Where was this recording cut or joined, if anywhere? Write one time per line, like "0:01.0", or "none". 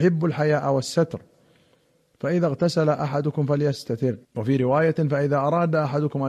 0:04.2